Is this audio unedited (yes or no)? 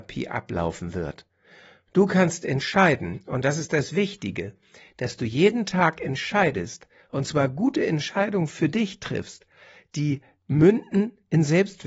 yes